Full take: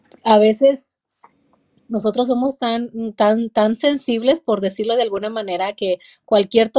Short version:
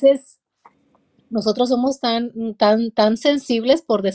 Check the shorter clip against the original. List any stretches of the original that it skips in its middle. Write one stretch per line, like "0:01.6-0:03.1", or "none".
none